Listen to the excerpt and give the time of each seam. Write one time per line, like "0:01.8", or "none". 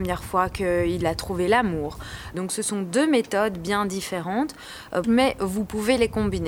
0:02.3
0:05.0

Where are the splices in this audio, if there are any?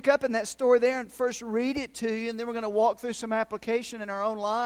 none

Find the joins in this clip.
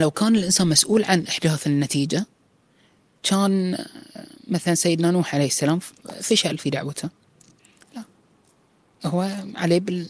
0:07.8

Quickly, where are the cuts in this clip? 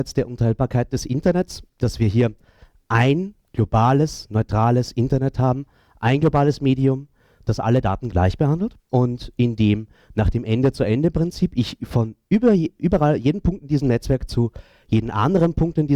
0:01.7
0:08.8

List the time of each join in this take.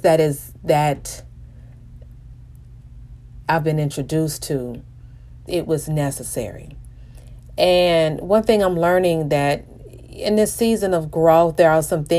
0:05.5

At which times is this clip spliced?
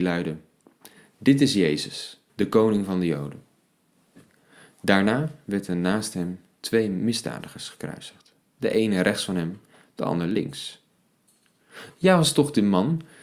0:02.3
0:11.9

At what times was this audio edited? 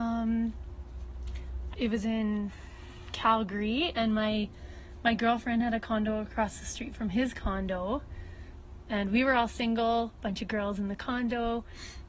0:01.7

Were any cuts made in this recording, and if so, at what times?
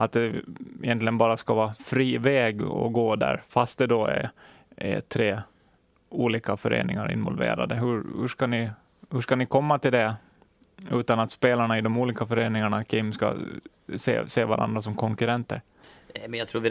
none

